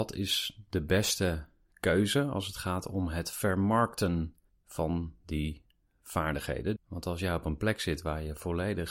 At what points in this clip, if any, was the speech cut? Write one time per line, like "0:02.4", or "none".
0:06.8